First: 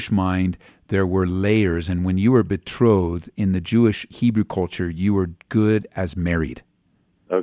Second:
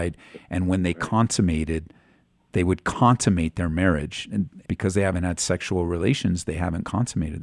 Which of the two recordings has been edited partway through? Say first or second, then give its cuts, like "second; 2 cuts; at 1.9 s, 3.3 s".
second; 1 cut; at 4.6 s